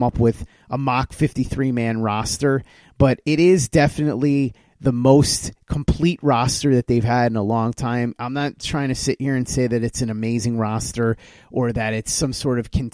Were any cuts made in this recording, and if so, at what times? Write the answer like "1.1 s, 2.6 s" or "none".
none